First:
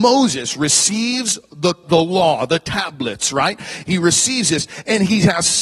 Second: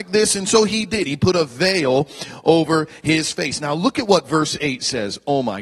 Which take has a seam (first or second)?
first